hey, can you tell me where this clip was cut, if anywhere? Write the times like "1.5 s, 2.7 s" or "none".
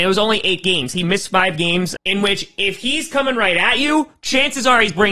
2.0 s